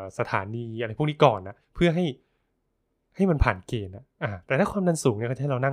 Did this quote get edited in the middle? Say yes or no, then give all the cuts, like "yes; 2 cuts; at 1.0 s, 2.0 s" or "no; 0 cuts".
yes; 1 cut; at 1.6 s